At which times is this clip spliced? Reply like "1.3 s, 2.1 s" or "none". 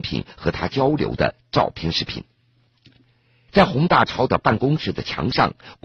3.5 s